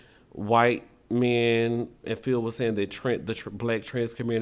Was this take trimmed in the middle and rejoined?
yes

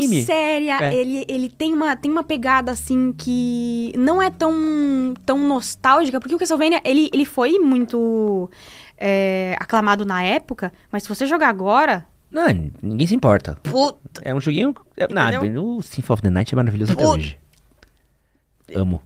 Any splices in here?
no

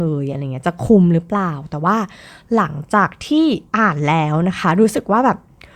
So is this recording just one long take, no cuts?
no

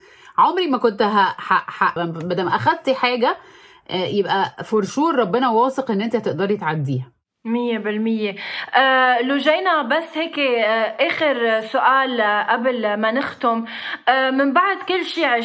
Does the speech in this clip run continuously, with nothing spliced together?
no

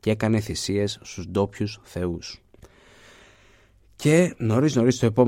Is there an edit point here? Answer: no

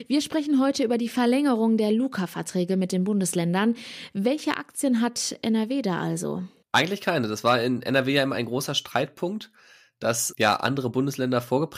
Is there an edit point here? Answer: no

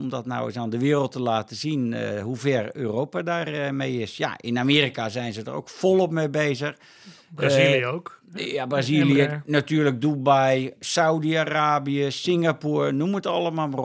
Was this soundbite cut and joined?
no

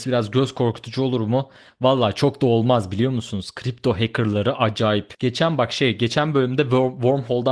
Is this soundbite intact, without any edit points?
yes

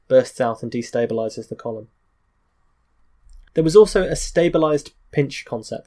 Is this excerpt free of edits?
no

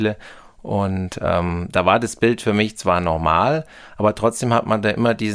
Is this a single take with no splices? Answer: yes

